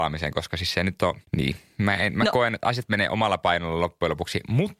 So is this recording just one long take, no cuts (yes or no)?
no